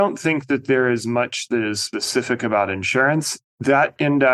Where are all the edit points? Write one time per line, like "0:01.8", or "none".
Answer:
0:03.4